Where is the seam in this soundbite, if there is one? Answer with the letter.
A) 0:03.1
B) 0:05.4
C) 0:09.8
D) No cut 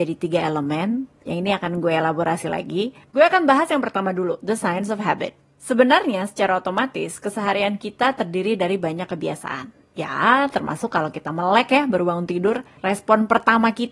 A